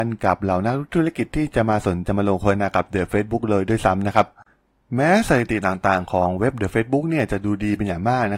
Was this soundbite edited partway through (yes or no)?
yes